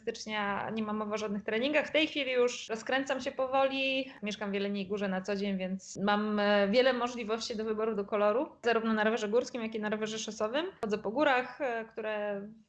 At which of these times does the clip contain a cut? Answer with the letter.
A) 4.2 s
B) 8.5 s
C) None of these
C